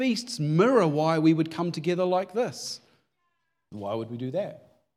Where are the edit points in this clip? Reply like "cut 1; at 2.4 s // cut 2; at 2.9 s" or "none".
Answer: cut 1; at 3.7 s